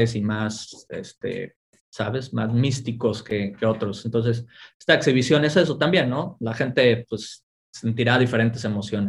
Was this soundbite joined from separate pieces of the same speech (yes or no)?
no